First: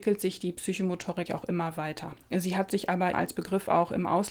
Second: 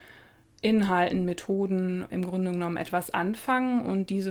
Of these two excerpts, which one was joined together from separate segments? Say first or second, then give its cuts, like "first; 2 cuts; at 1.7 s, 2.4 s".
first; 2 cuts; at 1.3 s, 3.1 s